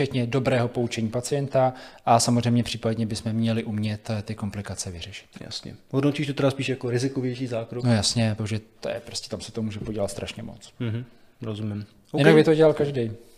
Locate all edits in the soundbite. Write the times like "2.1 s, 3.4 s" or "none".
8.4 s